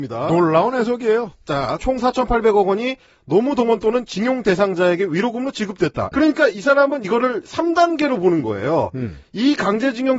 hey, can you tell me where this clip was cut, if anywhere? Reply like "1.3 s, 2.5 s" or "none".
1.8 s, 6.1 s

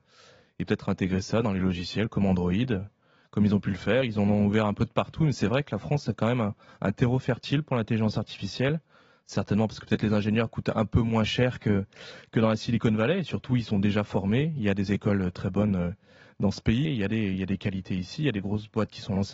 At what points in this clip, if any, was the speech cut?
15.3 s, 16.9 s

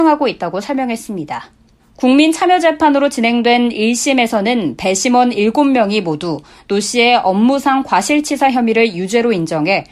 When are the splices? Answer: 1.8 s

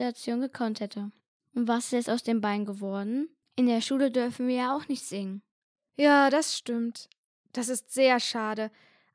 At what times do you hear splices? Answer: 3.4 s

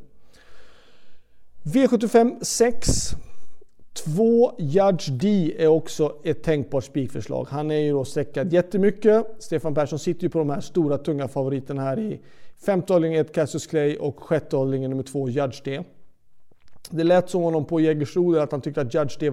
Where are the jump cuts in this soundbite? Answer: none

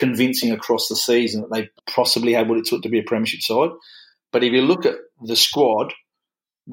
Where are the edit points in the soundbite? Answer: 1.8 s

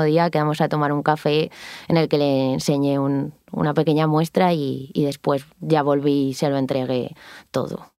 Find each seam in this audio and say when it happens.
none

